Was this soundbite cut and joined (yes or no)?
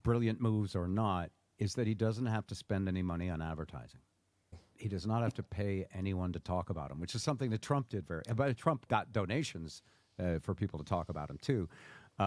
yes